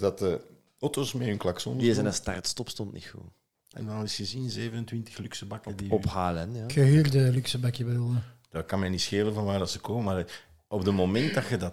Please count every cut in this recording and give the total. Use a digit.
1